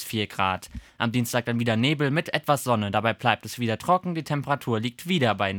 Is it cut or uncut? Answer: uncut